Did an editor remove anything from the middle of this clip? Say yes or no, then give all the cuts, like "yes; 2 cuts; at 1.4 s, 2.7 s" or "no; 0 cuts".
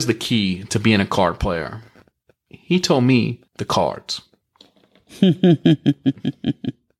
yes; 1 cut; at 3.5 s